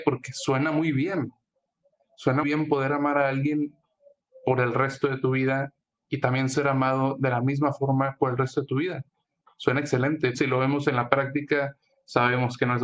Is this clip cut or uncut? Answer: cut